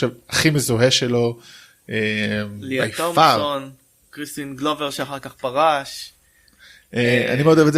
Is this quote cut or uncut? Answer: uncut